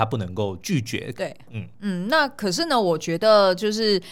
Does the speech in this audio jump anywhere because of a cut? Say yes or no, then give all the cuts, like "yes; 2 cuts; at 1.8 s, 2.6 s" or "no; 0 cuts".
yes; 1 cut; at 1.1 s